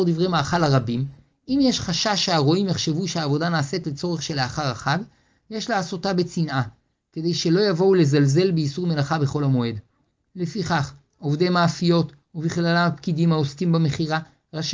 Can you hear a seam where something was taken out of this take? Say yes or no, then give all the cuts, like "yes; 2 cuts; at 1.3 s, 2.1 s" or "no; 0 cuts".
yes; 1 cut; at 10.3 s